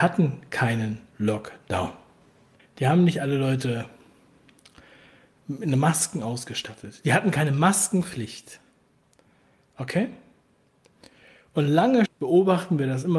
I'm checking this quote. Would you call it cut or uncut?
cut